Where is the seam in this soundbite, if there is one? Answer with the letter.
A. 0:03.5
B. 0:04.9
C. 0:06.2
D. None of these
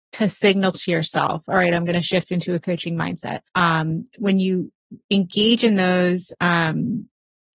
A